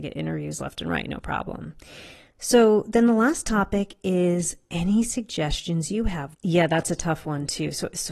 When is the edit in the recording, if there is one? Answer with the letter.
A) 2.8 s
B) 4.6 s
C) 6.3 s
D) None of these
C